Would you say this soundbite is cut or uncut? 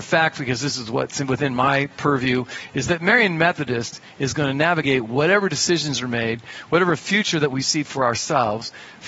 uncut